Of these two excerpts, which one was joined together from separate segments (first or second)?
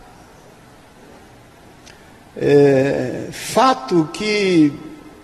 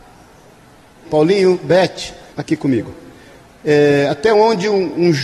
second